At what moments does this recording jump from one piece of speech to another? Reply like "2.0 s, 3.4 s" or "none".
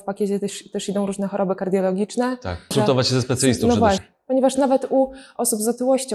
2.7 s, 4.0 s